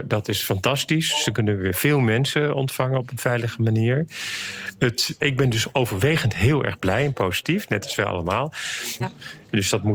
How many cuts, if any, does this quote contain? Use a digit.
2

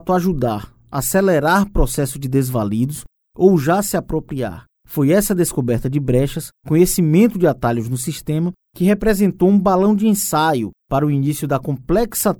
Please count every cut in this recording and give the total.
0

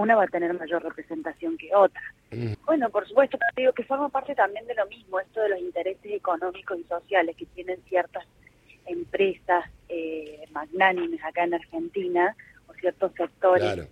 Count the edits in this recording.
1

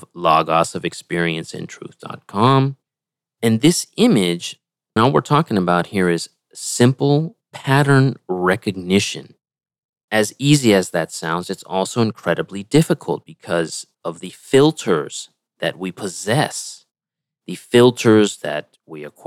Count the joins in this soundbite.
1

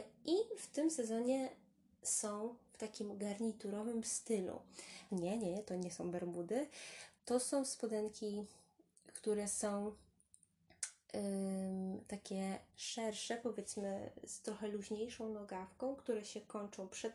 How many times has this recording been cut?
1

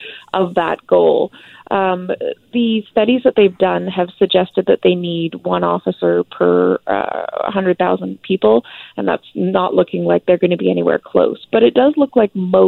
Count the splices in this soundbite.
0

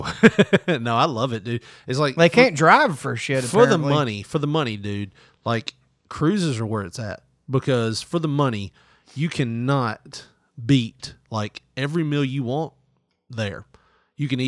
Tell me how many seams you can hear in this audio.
0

